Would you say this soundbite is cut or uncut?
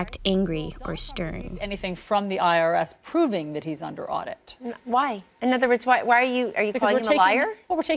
cut